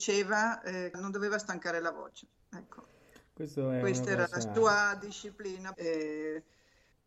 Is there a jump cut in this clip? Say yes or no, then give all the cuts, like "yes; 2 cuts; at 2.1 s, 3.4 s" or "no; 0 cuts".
yes; 2 cuts; at 0.9 s, 5.7 s